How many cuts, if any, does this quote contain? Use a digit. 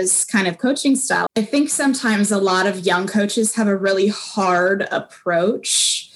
1